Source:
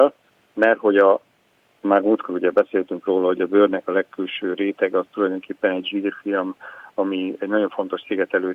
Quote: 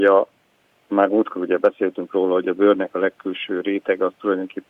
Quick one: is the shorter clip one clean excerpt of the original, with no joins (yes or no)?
yes